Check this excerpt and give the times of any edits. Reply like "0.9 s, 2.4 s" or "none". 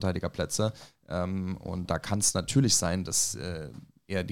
none